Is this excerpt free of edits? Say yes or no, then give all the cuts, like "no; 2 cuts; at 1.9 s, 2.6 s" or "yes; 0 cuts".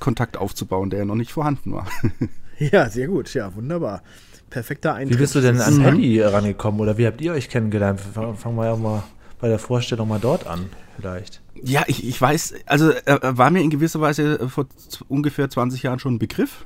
yes; 0 cuts